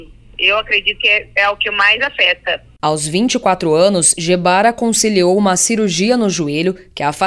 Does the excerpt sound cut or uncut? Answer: uncut